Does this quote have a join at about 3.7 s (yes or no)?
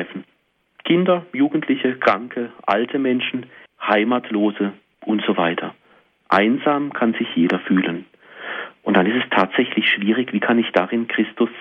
yes